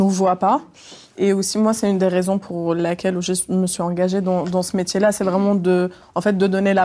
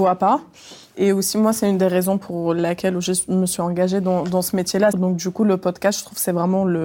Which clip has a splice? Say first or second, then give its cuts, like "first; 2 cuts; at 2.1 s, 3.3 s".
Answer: second; 1 cut; at 4.9 s